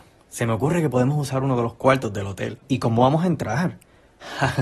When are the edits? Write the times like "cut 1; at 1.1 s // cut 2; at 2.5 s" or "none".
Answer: cut 1; at 2.6 s